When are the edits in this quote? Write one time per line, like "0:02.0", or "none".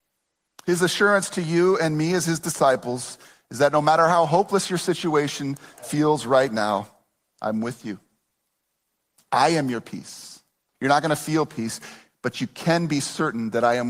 0:10.7